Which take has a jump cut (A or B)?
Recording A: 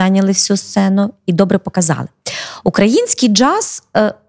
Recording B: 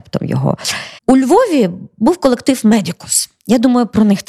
B